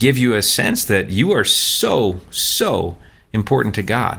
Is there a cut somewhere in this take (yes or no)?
no